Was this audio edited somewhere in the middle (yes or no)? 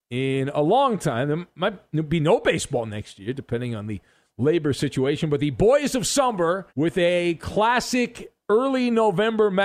yes